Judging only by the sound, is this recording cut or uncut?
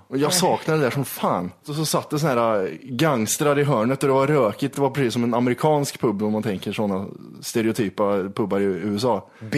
uncut